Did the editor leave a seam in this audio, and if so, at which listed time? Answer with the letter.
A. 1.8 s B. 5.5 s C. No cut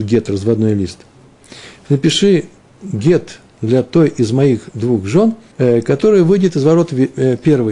B